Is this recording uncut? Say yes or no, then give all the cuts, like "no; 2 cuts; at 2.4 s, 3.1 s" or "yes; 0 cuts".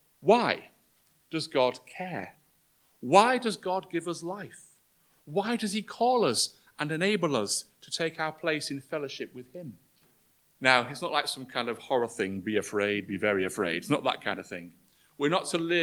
no; 1 cut; at 10.5 s